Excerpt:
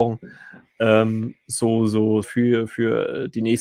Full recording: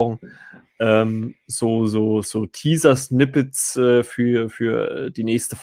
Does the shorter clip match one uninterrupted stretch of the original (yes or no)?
no